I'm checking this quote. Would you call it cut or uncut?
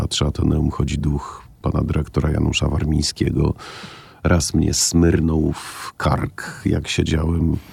uncut